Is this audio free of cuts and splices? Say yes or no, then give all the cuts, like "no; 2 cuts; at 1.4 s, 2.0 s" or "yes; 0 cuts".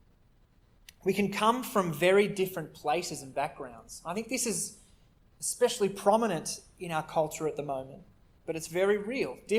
yes; 0 cuts